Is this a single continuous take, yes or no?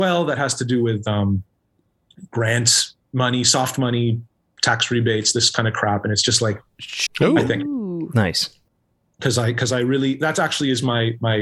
no